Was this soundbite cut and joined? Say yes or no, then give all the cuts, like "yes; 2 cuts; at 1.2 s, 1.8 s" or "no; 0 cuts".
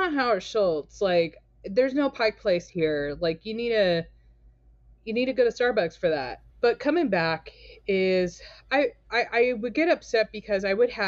yes; 1 cut; at 6.5 s